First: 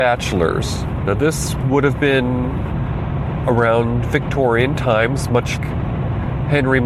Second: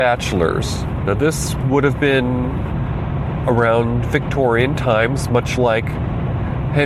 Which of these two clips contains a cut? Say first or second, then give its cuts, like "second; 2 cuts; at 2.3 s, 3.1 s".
first; 1 cut; at 5.6 s